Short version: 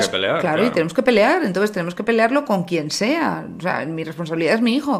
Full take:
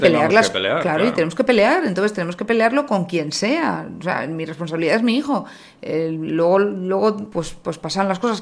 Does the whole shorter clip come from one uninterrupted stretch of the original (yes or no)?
yes